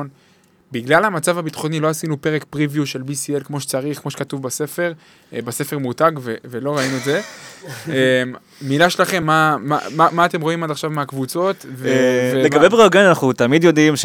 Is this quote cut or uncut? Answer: uncut